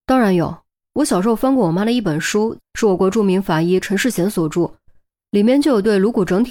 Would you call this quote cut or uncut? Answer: cut